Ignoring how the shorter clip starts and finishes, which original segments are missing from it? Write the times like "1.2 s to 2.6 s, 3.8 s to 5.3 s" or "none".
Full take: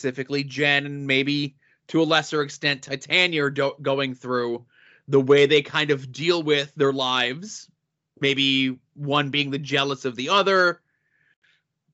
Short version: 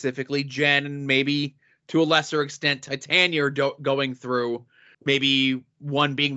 4.9 s to 8.1 s